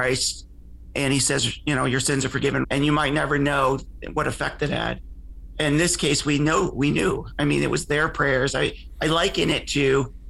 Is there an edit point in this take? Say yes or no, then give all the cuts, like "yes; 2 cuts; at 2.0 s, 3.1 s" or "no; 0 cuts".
yes; 1 cut; at 2.6 s